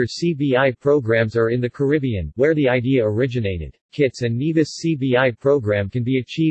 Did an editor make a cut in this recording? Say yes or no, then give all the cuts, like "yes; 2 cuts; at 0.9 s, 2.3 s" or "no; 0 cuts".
yes; 1 cut; at 3.9 s